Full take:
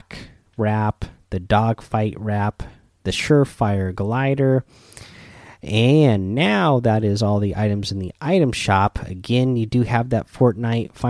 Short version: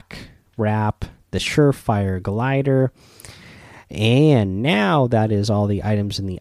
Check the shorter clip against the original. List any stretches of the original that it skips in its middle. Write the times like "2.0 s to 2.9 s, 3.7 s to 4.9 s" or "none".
1.2 s to 3.0 s